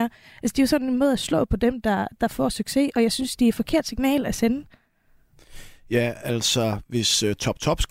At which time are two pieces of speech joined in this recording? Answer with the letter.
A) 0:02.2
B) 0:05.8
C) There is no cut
C